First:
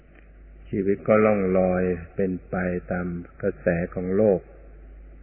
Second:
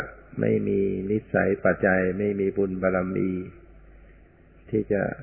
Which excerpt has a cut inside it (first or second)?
second